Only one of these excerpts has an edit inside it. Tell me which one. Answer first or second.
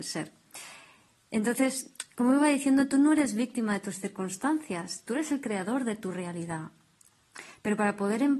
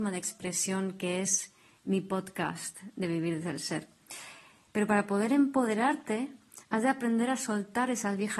second